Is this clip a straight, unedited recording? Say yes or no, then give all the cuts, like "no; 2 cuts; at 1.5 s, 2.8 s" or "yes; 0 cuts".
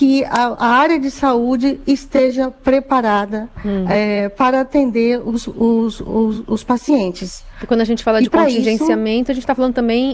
yes; 0 cuts